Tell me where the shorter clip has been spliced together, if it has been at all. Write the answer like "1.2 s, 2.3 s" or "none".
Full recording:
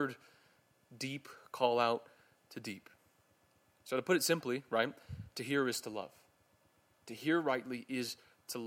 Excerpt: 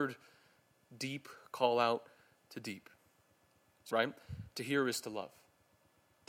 3.9 s

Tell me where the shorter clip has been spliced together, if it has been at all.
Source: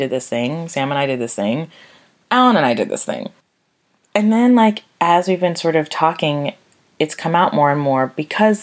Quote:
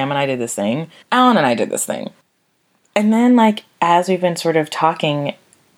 1.0 s

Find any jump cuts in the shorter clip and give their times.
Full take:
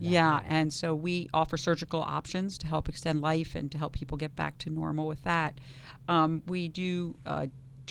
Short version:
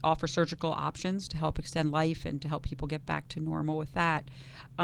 none

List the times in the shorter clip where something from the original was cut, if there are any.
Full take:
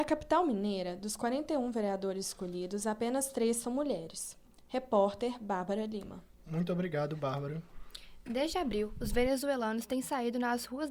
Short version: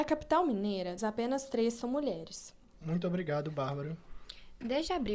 1.0 s, 2.7 s

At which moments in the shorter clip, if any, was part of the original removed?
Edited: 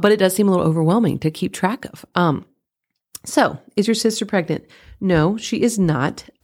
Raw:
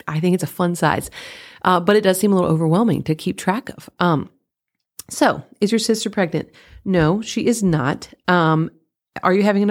none

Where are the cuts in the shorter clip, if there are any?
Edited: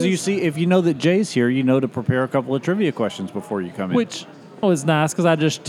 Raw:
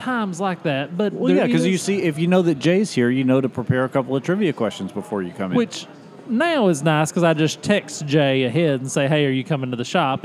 4.6 s

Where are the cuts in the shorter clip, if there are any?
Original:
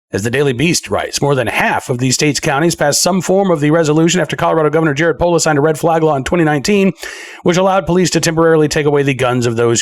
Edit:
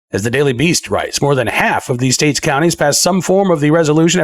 none

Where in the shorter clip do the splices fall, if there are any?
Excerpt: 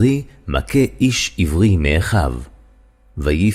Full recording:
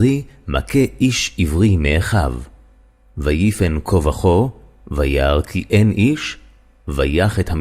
none

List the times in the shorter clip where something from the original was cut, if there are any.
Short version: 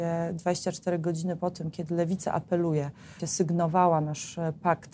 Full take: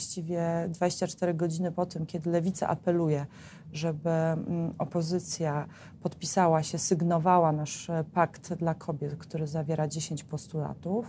3.2 s

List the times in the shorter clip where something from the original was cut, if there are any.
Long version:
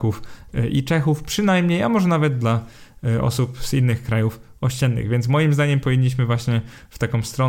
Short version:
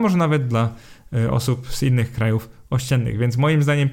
none

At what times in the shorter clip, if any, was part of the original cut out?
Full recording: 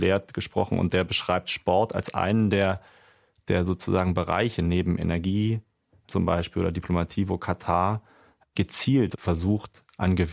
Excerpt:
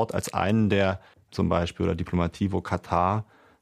1.1 s

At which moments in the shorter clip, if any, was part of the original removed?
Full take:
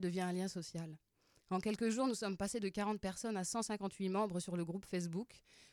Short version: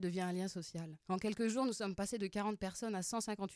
1.0 s

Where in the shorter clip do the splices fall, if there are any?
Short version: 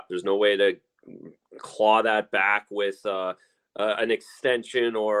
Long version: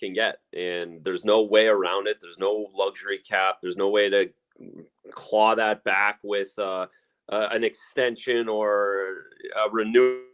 none

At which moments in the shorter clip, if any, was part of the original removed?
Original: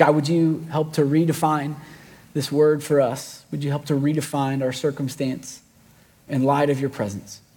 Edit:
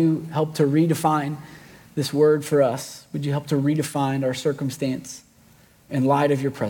none

